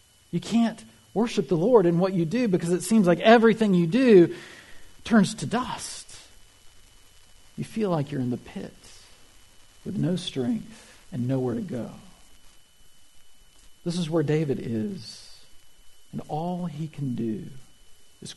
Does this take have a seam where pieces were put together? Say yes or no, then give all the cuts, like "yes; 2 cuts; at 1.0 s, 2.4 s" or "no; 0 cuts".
yes; 1 cut; at 11.0 s